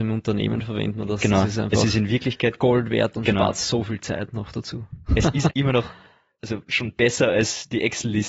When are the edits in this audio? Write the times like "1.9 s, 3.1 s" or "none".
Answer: 5.5 s